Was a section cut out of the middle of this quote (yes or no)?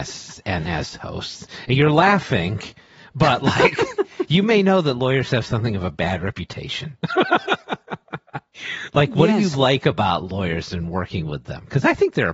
no